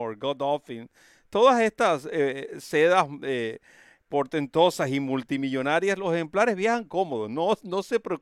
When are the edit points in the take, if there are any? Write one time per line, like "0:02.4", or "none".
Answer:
none

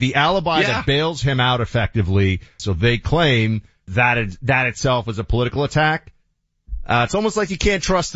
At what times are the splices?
0:02.6
0:03.9

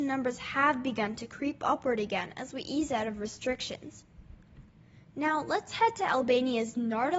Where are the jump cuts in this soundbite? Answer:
none

